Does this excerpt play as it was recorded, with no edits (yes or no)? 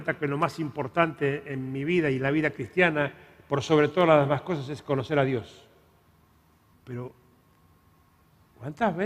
no